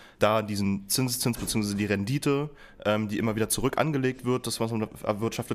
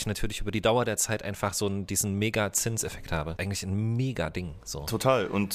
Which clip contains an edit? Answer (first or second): second